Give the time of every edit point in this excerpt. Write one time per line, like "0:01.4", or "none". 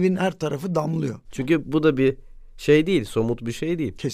0:01.2